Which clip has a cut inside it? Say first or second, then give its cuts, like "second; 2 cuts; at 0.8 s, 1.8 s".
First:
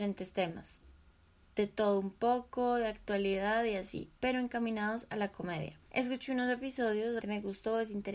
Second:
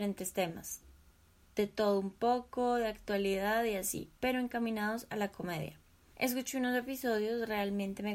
first; 2 cuts; at 5.8 s, 7.2 s